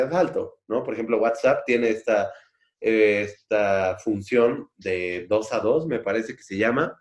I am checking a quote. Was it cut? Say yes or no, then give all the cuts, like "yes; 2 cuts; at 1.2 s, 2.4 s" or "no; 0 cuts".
no; 0 cuts